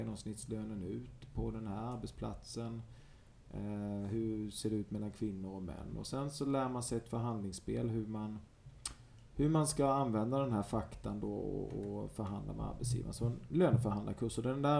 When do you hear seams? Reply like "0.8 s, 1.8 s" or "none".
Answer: none